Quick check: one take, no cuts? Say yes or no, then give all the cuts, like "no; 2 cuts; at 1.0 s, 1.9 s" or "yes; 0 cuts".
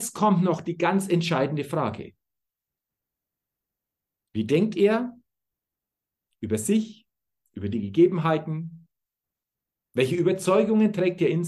no; 1 cut; at 4.3 s